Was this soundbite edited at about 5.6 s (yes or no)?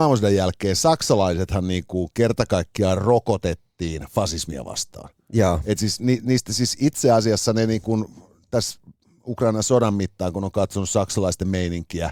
no